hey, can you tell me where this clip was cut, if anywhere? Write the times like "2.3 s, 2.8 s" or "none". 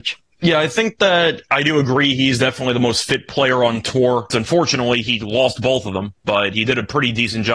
4.3 s